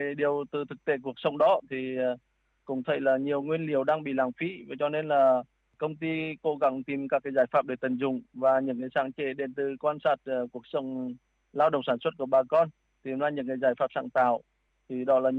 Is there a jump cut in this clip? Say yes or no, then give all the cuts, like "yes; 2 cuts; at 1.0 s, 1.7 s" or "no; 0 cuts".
no; 0 cuts